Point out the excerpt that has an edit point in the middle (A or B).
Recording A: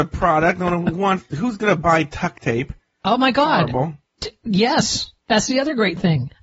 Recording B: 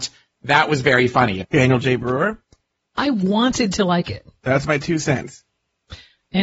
B